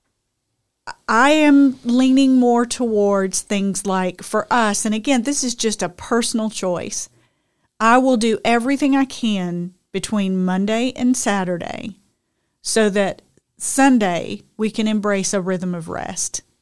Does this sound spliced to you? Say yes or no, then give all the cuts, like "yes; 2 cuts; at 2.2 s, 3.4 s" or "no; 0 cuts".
no; 0 cuts